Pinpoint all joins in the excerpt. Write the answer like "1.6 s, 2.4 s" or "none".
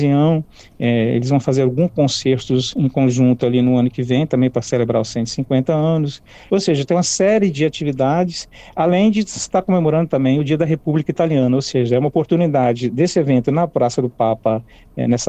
none

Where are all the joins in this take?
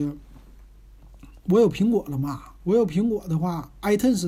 none

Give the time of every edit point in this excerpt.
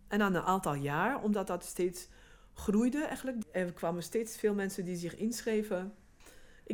3.4 s

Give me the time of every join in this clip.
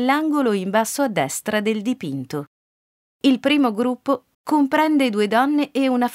3.1 s, 4.3 s

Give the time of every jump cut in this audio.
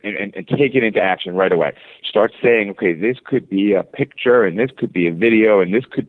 2.0 s

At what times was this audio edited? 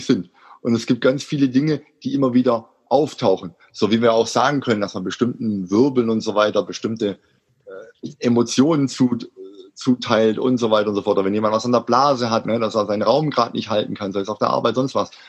12.4 s

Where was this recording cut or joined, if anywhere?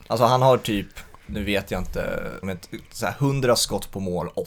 1.3 s, 2.4 s

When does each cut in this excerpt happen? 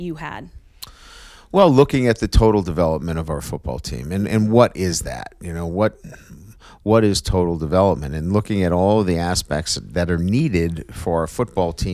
none

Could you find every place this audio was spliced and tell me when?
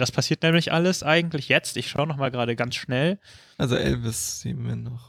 3.6 s

